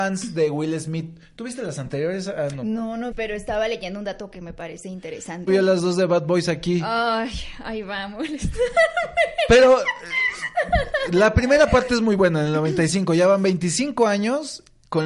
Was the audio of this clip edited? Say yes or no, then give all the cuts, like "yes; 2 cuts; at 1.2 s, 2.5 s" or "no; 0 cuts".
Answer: yes; 2 cuts; at 3.1 s, 5.5 s